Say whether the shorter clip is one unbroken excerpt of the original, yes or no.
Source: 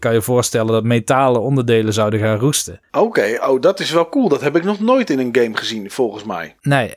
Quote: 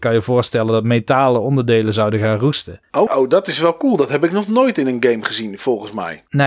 no